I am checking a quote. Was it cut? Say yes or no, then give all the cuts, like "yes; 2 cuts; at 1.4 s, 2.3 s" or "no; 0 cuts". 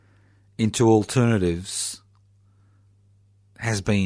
no; 0 cuts